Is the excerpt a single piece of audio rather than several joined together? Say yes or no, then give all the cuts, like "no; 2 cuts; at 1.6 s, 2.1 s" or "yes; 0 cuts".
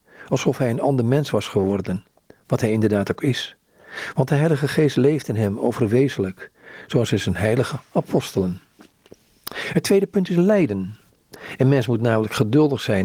yes; 0 cuts